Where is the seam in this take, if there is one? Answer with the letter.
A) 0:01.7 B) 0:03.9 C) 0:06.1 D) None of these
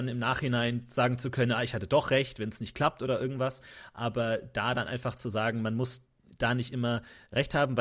D